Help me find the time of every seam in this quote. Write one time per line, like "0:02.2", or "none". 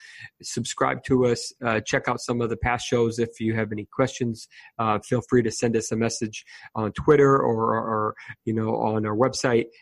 none